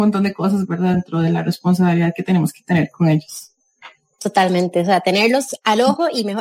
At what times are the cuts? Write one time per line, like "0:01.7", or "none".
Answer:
none